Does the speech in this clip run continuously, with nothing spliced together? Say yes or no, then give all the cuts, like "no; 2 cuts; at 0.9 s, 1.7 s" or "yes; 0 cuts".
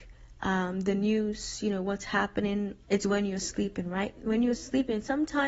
no; 1 cut; at 2.8 s